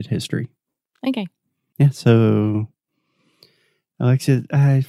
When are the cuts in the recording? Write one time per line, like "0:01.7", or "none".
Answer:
none